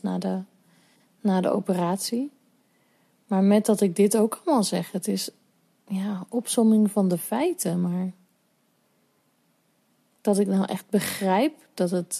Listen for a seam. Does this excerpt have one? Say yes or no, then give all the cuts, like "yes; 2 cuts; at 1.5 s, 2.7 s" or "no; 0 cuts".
no; 0 cuts